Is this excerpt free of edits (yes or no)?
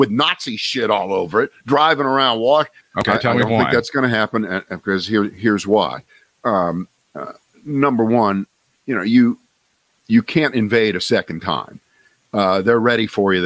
no